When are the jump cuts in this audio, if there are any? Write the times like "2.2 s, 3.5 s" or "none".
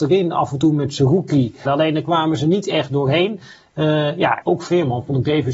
1.6 s, 4.4 s